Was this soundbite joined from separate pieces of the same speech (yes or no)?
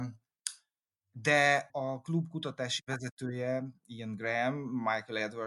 yes